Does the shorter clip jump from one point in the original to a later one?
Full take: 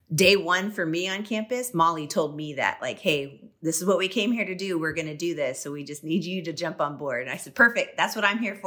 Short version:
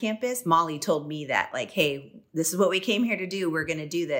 no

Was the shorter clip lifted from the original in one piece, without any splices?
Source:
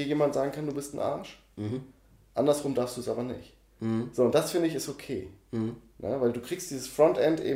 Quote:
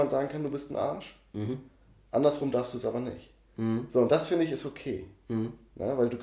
yes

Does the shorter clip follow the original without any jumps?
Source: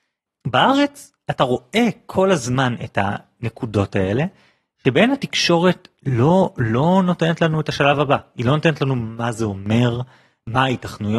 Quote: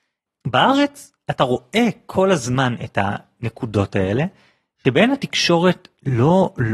yes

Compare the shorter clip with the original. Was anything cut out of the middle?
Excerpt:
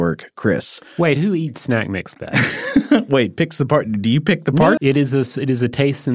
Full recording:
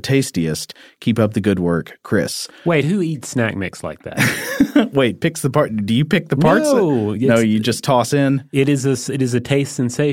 yes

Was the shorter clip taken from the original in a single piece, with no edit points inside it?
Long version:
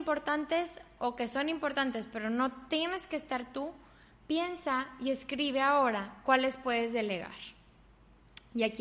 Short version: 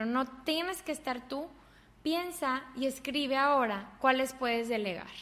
yes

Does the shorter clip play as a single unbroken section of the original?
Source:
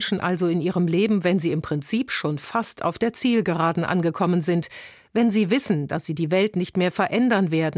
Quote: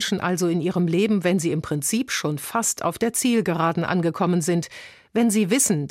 yes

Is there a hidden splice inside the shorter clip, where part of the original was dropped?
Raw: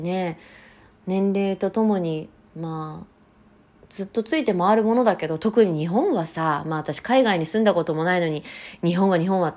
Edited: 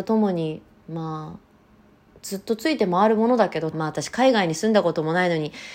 yes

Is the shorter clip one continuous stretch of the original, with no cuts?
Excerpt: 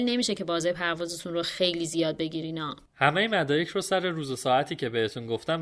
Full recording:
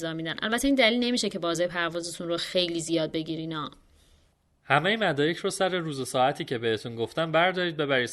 no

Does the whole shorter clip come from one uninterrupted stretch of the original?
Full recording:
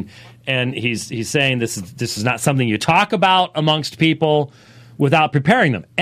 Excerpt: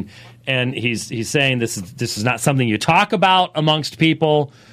yes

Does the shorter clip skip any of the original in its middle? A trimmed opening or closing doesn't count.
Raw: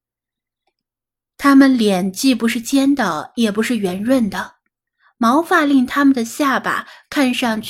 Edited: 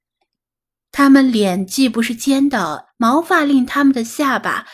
yes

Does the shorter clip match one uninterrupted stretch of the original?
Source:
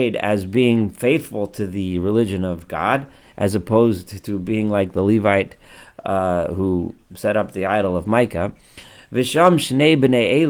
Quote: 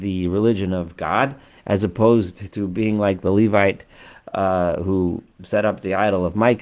yes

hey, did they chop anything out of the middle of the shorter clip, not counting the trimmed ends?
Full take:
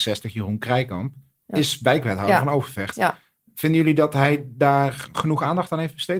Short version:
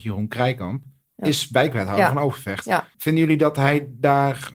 yes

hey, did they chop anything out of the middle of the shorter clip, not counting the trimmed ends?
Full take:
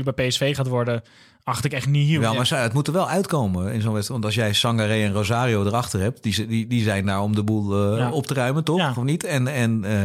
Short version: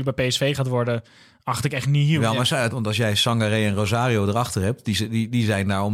yes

